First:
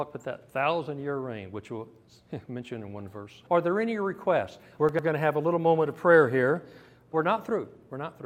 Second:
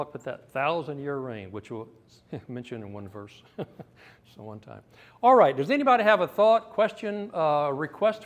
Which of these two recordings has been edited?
first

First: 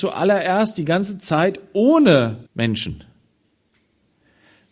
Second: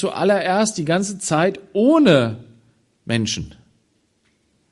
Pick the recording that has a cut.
first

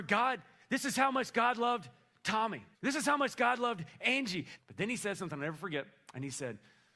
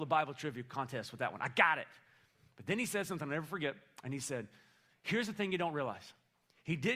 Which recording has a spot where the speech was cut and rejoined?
first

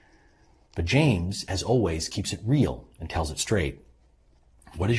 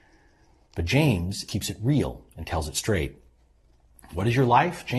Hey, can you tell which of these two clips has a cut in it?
second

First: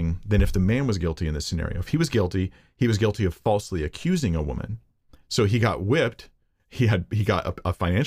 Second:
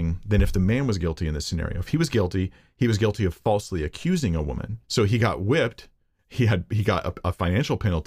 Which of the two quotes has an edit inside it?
second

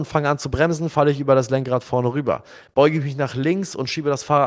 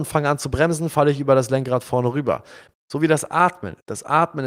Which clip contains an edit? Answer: second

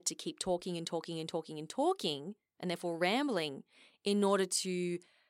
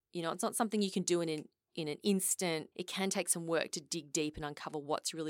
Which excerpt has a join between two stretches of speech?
second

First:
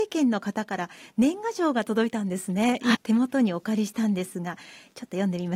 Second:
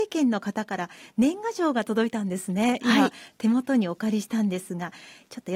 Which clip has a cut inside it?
first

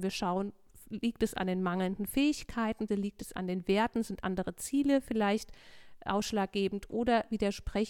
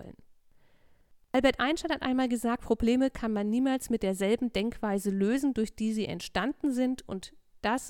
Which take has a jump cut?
first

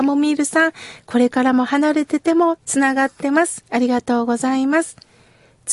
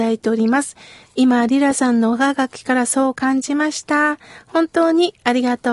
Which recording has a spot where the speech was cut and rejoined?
second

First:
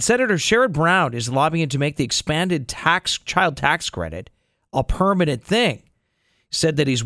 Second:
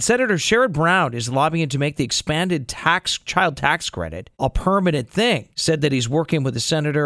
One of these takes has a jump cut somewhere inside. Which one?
second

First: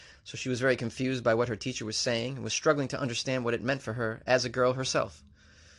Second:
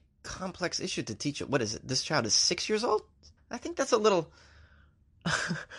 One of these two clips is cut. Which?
second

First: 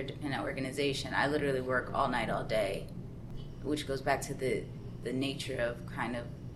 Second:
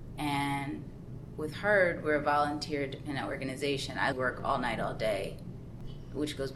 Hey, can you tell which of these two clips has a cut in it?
second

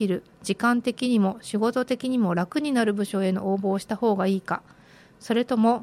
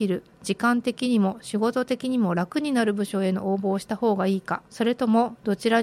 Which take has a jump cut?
second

